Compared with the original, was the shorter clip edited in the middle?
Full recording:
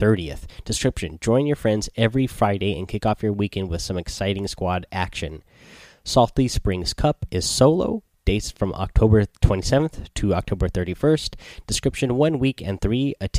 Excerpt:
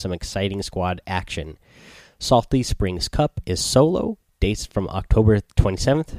no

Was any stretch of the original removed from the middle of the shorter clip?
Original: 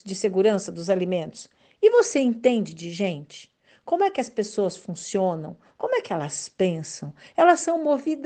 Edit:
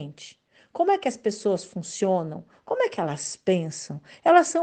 no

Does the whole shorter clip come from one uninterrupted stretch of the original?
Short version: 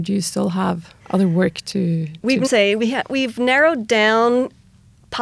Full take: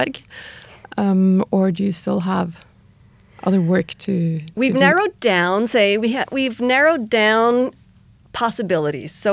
no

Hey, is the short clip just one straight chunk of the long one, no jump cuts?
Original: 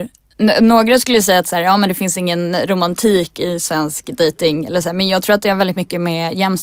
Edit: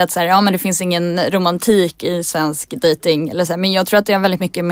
yes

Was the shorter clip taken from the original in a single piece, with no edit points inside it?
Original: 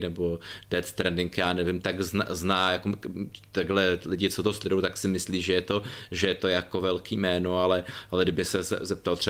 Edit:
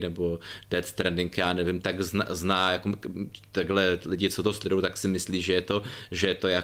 yes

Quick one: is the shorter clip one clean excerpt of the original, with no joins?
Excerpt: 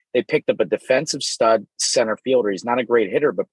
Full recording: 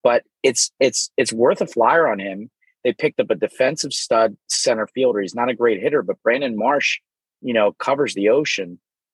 yes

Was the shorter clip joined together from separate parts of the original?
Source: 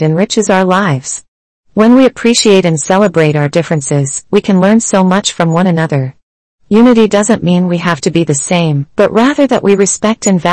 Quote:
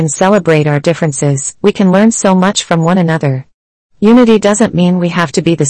no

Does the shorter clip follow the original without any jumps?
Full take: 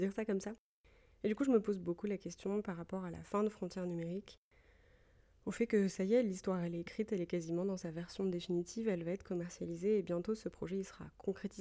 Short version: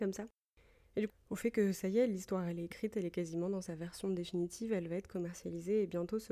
no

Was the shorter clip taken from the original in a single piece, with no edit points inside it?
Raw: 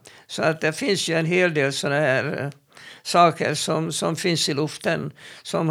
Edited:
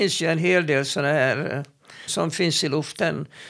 no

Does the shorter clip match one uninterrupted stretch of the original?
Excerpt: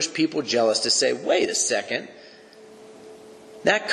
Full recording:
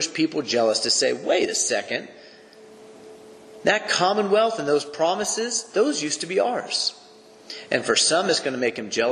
yes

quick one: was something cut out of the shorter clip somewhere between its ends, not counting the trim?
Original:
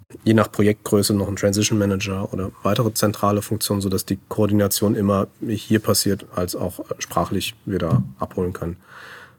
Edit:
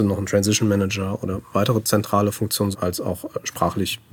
yes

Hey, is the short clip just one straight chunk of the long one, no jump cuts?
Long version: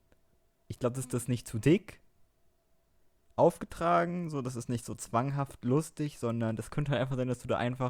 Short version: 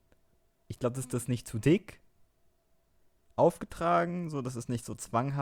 yes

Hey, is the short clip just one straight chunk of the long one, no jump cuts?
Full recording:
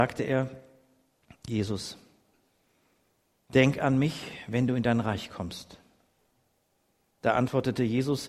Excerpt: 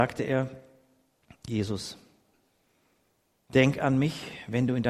yes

